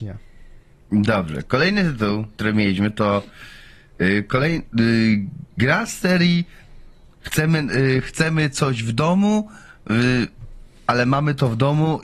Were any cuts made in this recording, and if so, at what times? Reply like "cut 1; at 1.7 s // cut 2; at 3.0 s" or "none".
cut 1; at 2.3 s